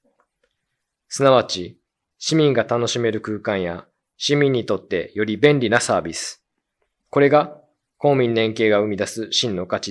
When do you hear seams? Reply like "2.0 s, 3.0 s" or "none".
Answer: none